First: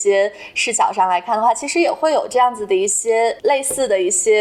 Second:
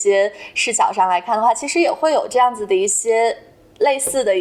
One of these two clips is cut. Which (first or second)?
first